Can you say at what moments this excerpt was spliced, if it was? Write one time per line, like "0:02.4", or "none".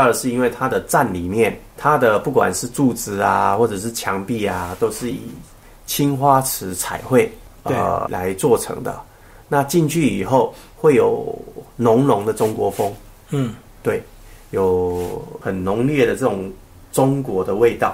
0:08.1